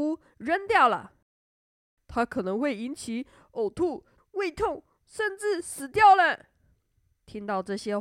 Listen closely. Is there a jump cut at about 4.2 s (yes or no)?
yes